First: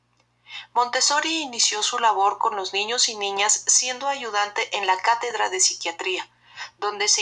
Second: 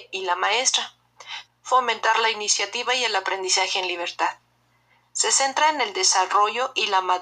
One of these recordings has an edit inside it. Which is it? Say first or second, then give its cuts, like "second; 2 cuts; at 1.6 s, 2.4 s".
second; 1 cut; at 1.5 s